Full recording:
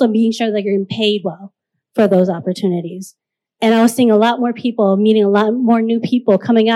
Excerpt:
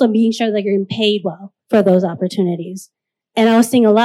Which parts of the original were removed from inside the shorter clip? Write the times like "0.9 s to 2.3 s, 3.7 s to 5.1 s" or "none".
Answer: 1.6 s to 1.9 s